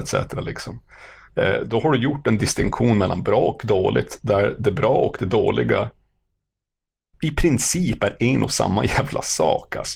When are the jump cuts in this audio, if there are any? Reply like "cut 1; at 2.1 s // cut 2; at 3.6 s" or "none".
none